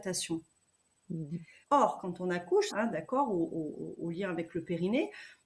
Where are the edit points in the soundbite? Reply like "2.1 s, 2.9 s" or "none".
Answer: 1.6 s, 2.7 s